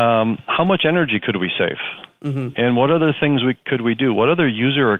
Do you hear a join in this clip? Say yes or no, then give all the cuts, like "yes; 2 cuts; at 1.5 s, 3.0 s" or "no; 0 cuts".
no; 0 cuts